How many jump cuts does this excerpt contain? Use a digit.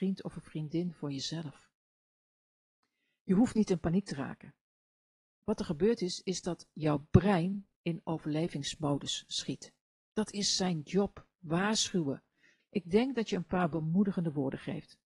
1